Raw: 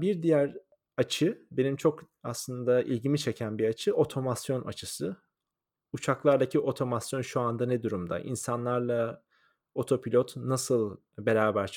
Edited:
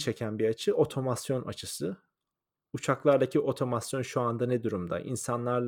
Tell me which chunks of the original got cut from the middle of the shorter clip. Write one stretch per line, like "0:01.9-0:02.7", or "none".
none